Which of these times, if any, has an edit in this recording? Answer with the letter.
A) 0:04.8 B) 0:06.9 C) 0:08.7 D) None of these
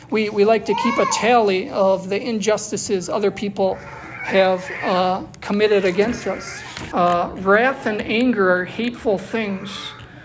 B